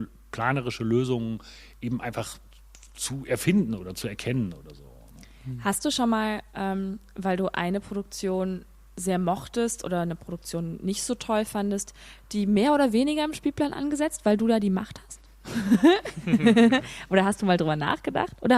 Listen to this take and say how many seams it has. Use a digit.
0